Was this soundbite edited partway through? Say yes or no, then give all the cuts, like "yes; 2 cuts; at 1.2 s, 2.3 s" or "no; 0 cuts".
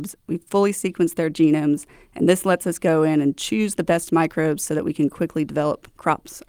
no; 0 cuts